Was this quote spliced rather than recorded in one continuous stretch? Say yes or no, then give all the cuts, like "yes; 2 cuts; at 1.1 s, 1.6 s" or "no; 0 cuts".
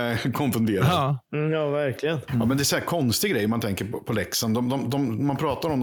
yes; 1 cut; at 2.3 s